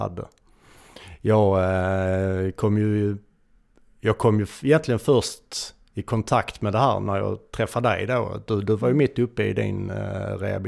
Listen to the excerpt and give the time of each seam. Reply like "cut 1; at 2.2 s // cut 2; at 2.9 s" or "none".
none